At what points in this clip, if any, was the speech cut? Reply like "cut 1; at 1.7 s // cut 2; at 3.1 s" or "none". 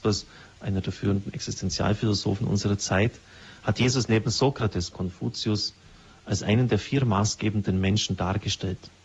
cut 1; at 4.9 s